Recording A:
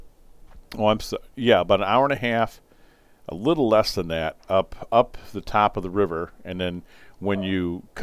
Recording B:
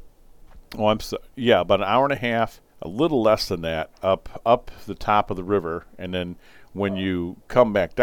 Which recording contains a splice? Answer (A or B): B